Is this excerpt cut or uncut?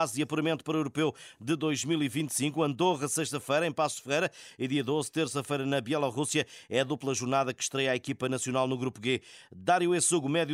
uncut